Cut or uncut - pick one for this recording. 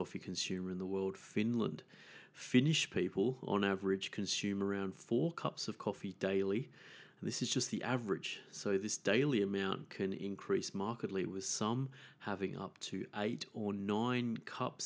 uncut